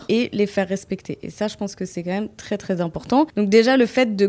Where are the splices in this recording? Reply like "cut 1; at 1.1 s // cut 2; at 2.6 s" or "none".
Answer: cut 1; at 3.3 s